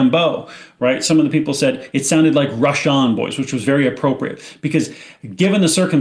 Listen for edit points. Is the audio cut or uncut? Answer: uncut